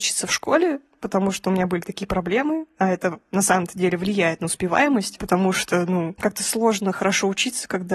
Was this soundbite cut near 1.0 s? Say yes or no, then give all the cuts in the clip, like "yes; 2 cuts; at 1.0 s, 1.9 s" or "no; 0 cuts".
yes; 1 cut; at 1.0 s